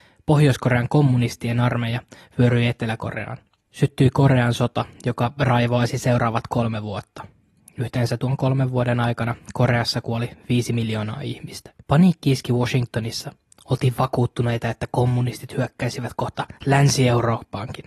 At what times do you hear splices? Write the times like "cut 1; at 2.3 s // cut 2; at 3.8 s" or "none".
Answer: cut 1; at 11.8 s